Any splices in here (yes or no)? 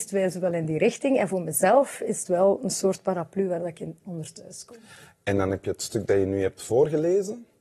no